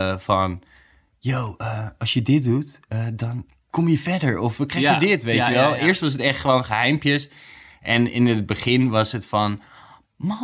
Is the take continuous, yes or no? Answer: yes